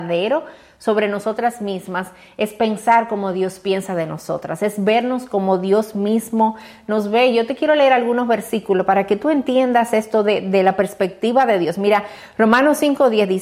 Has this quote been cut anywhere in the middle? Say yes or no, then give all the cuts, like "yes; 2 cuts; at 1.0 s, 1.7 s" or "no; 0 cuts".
no; 0 cuts